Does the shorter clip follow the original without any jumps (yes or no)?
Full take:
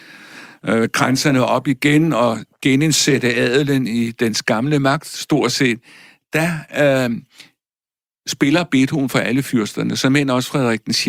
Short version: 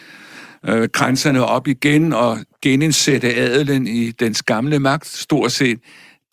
yes